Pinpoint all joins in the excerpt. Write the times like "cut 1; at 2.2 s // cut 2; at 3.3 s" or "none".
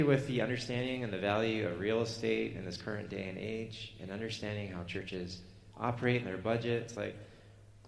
none